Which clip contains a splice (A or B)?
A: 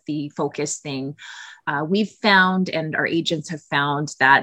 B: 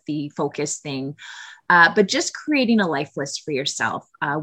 A